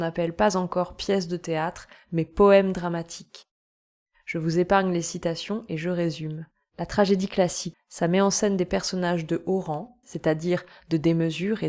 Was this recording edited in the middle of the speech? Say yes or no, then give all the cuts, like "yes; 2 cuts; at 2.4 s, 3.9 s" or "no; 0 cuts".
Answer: yes; 2 cuts; at 7.7 s, 10.0 s